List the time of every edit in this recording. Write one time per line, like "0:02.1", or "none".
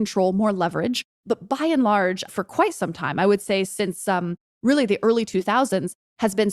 0:01.1
0:02.3